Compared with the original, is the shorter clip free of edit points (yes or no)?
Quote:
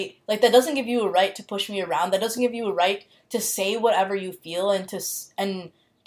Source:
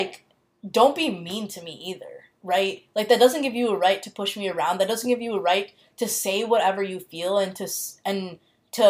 yes